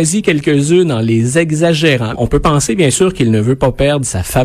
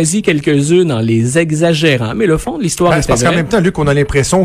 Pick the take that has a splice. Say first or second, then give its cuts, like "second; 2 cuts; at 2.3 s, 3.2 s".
first; 1 cut; at 2.1 s